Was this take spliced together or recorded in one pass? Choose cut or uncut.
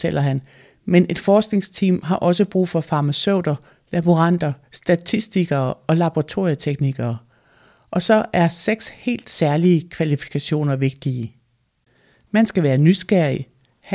uncut